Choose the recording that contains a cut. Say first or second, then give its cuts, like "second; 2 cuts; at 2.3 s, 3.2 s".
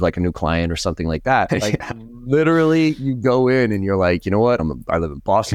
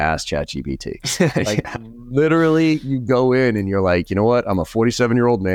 first; 2 cuts; at 1.5 s, 4.6 s